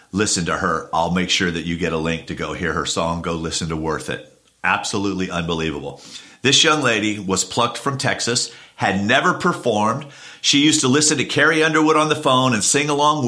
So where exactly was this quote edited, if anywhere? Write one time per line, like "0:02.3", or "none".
none